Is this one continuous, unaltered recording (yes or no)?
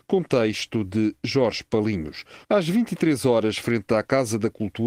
no